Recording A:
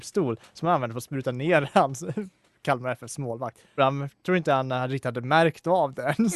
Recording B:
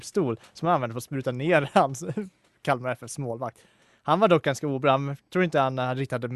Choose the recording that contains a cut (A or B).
A